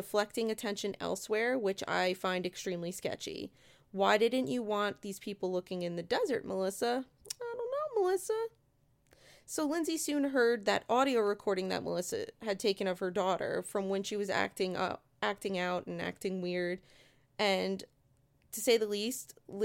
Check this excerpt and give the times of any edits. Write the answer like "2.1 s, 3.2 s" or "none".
none